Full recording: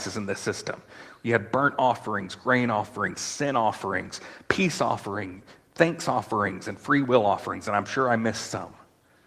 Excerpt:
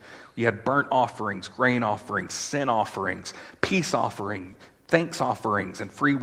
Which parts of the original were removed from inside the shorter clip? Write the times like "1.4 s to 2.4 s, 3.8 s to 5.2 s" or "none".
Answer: none